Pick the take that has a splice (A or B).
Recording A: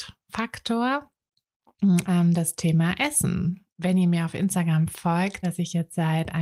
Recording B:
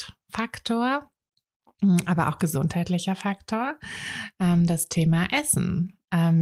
A